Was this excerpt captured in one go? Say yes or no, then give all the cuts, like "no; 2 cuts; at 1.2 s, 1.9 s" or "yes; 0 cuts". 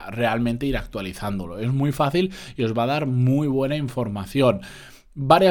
yes; 0 cuts